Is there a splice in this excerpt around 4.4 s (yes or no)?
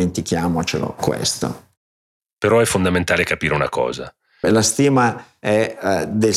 yes